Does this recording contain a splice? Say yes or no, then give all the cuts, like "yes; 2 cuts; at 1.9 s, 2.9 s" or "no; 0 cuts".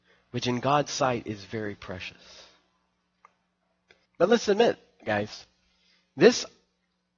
yes; 1 cut; at 4.1 s